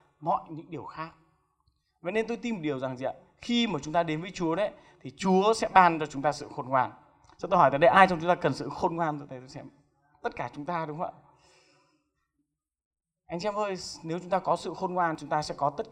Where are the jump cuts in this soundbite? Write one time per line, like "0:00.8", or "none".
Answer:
none